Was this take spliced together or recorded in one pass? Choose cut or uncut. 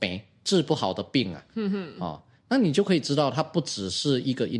uncut